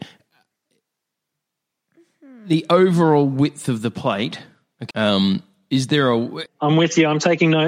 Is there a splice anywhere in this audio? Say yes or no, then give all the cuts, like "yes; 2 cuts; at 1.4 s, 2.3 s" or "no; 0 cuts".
yes; 2 cuts; at 4.9 s, 6.5 s